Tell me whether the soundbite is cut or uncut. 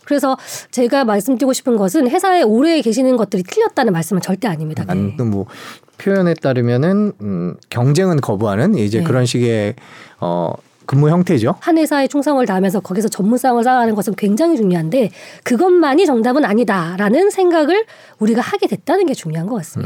cut